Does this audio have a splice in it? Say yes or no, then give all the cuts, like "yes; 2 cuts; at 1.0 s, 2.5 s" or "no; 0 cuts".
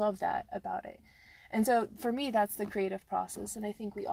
no; 0 cuts